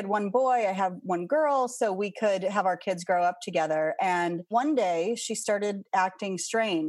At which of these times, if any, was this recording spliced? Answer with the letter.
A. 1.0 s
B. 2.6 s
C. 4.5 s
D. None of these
C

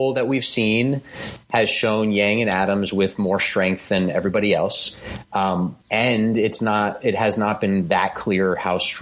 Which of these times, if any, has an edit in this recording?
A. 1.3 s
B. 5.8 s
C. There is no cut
B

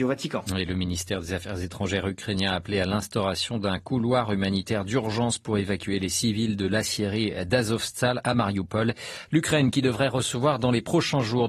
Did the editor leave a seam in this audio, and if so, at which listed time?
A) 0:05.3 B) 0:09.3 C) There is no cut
B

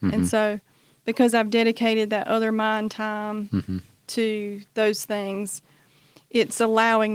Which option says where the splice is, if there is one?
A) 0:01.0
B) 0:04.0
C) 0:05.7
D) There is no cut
D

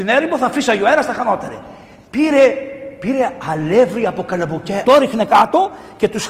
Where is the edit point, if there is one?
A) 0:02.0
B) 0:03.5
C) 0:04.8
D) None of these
C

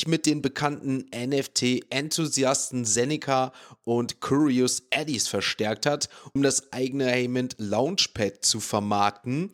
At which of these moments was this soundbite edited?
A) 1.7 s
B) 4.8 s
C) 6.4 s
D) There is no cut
C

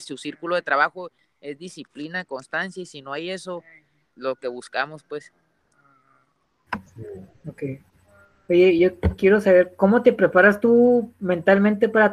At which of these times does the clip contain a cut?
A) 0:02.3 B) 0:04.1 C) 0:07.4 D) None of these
B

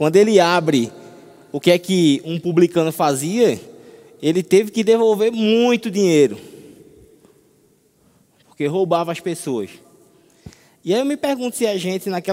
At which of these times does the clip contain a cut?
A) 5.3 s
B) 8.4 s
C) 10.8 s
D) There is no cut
D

